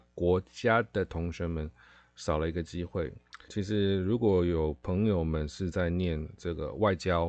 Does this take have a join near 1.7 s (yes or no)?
no